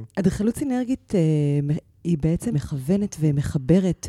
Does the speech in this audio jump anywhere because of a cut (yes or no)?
yes